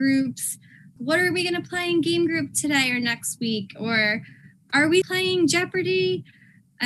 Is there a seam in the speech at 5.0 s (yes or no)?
yes